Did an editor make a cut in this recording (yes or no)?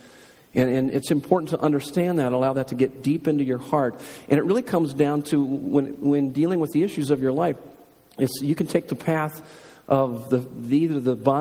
no